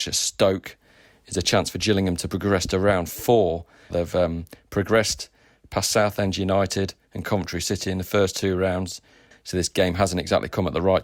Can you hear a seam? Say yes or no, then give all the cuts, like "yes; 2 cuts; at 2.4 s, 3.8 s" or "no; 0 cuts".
yes; 2 cuts; at 3.9 s, 9.3 s